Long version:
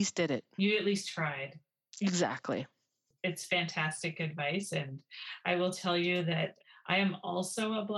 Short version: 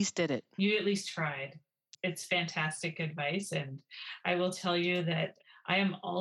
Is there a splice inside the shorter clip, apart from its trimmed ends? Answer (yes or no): yes